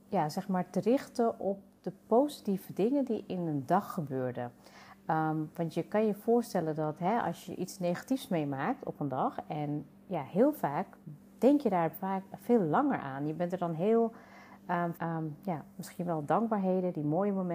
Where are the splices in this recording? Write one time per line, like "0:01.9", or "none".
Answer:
0:14.9